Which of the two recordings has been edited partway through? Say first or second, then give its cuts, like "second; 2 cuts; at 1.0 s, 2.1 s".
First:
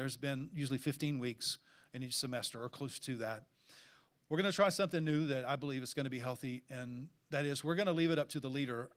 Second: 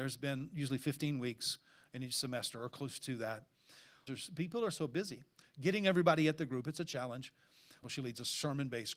second; 2 cuts; at 4.1 s, 7.8 s